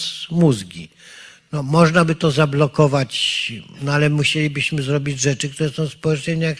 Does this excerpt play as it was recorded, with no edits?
yes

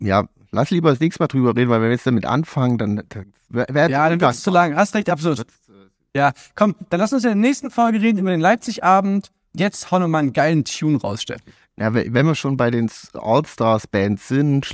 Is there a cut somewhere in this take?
no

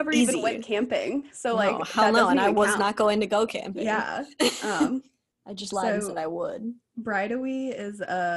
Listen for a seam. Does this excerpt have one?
no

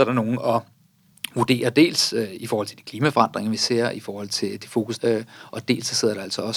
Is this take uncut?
no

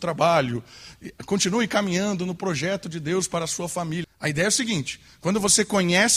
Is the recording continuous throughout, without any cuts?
no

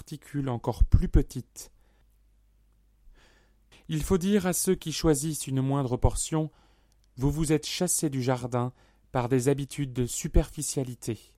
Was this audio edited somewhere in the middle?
yes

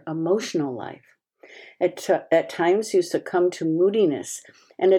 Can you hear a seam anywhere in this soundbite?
no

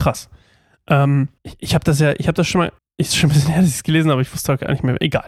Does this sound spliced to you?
yes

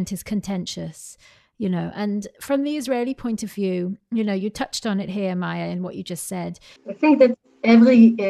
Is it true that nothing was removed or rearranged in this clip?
no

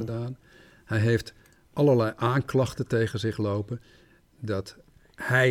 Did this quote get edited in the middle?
no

